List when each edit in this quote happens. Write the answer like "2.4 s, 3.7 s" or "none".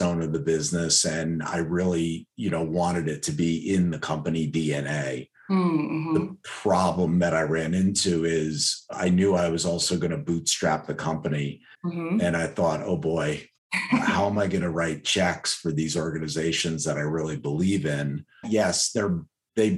11.7 s, 18.4 s